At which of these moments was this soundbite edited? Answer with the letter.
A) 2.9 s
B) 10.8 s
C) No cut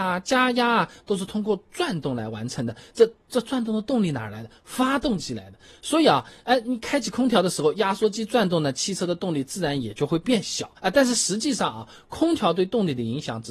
B